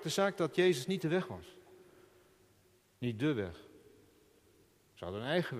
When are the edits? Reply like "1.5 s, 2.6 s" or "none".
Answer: none